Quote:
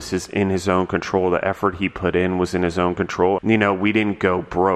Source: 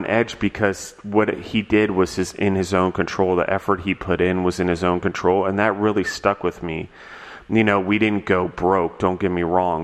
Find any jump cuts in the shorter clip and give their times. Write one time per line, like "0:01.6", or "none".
0:03.4